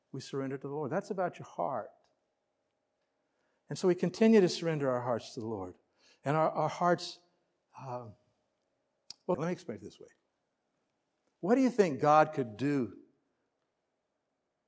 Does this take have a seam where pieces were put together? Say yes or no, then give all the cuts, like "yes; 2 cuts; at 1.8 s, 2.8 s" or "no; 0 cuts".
yes; 1 cut; at 9.3 s